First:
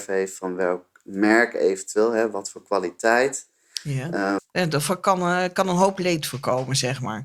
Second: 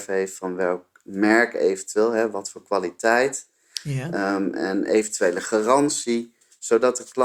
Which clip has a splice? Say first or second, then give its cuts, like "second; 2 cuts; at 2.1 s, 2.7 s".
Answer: first; 1 cut; at 4.4 s